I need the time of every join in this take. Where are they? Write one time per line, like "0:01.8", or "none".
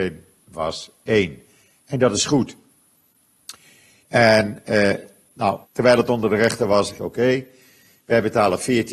0:04.0
0:05.6
0:07.0

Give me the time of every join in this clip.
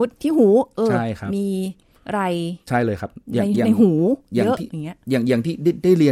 0:03.2

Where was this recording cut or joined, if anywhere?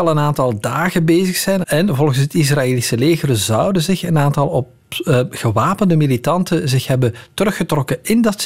0:01.6

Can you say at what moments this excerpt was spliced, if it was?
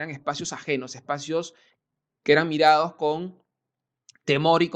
none

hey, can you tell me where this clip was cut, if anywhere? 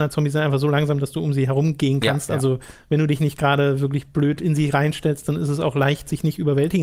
none

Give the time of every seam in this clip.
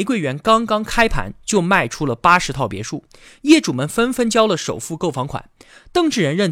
none

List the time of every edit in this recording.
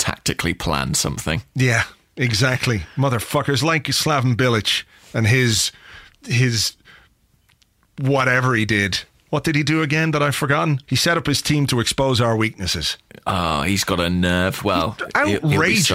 0:10.8

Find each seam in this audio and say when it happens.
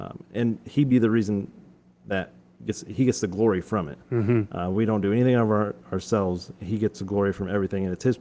none

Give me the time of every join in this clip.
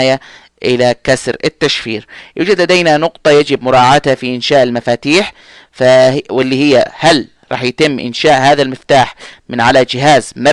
none

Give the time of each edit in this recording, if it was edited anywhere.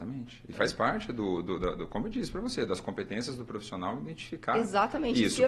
none

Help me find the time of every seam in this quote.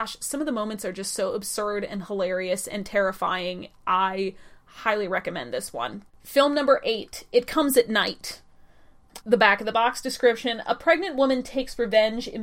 0:06.1
0:09.2

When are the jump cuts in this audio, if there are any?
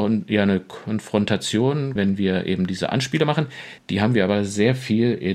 0:02.0
0:03.8

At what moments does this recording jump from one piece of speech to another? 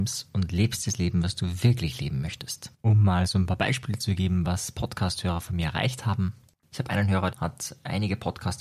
0:02.7
0:07.3

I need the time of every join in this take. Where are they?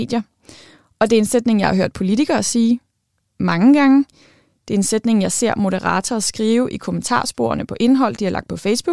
none

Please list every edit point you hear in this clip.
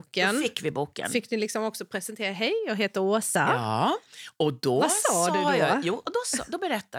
none

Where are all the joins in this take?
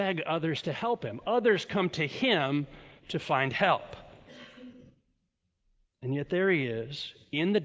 none

